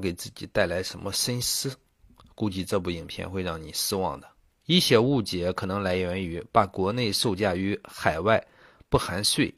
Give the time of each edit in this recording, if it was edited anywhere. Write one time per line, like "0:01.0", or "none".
0:04.6